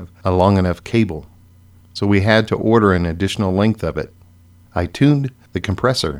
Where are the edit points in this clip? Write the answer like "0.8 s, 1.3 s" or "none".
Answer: 4.6 s